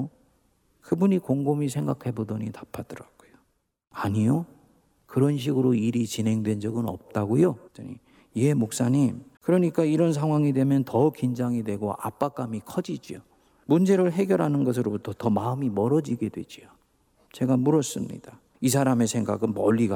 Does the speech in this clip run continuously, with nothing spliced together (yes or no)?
no